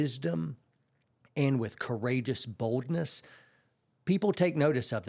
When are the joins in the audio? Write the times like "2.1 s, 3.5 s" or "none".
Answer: none